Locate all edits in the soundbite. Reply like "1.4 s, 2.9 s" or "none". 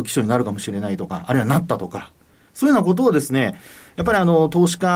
none